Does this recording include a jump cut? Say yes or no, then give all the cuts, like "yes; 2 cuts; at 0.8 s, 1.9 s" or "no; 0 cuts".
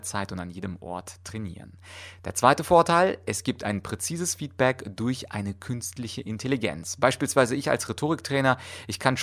no; 0 cuts